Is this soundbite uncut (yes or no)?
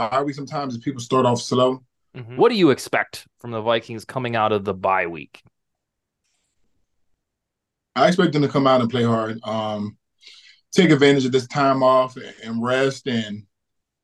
no